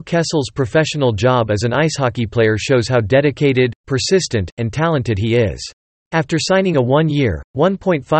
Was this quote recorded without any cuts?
no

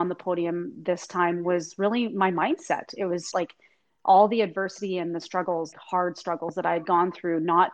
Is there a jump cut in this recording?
yes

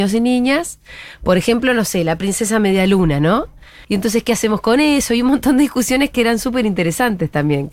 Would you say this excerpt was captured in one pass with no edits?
no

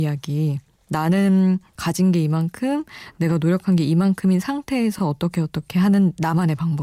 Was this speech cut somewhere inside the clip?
no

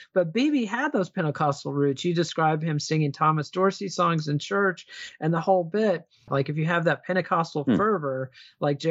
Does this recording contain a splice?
yes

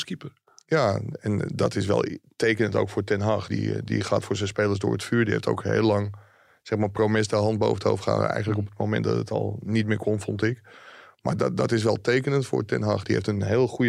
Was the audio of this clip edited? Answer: no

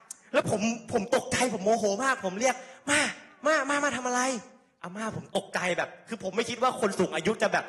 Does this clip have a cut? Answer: no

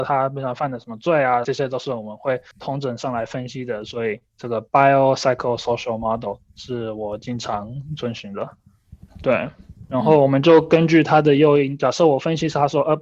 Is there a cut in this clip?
yes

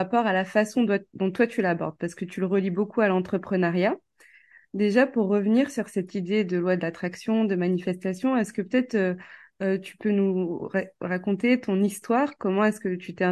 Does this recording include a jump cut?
no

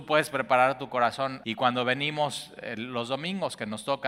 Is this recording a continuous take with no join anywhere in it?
no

